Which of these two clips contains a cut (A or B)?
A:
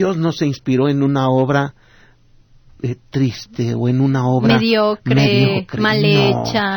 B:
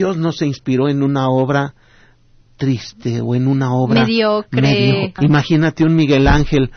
B